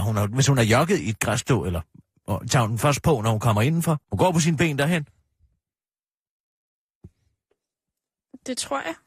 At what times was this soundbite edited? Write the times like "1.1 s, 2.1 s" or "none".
4.0 s